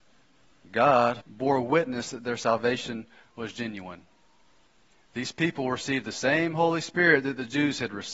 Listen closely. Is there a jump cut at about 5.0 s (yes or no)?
no